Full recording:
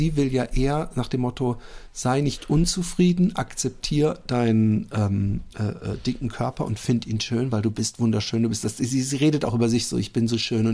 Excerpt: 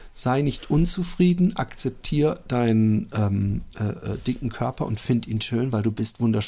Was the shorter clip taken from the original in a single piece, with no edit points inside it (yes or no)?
yes